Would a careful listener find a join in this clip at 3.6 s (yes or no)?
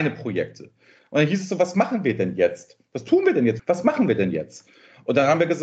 yes